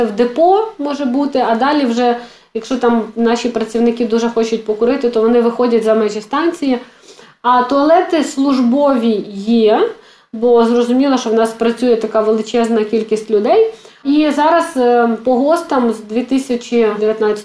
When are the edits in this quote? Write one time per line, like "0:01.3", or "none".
none